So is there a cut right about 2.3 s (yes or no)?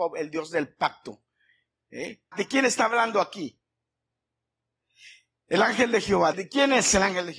yes